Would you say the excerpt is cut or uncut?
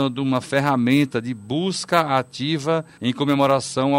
cut